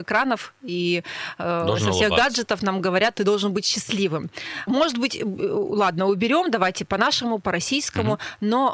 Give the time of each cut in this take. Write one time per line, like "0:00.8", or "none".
0:04.7